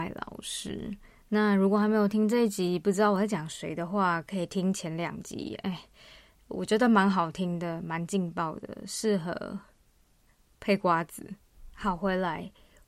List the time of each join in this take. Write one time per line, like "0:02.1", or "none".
none